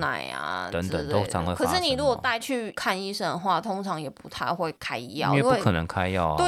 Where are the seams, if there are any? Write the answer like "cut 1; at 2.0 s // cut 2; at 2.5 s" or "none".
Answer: none